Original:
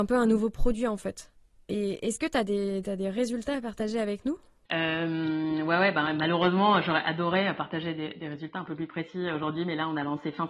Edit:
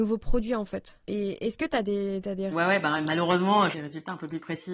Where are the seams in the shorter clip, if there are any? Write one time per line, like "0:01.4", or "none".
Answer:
0:01.0
0:02.5
0:03.7